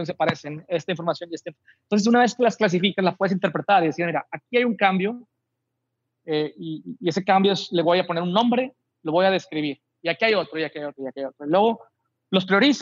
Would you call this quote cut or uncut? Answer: cut